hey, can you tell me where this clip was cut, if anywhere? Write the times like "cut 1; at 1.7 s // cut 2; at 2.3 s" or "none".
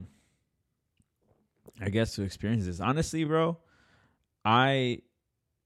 none